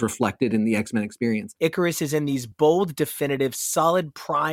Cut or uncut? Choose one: cut